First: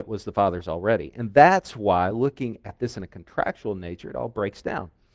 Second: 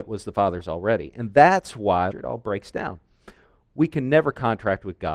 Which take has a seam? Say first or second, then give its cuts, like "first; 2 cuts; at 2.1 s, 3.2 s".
second; 1 cut; at 2.1 s